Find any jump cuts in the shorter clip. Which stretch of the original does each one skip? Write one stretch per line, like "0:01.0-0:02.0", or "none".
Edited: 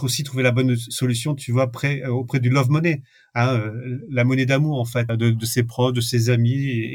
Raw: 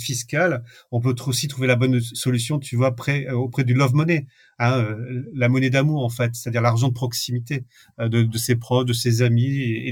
0:06.3-0:08.0